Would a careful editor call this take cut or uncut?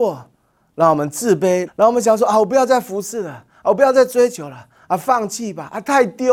cut